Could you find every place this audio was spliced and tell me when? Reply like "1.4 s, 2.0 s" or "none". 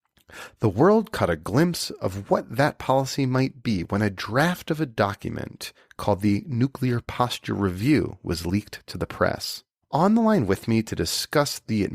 9.8 s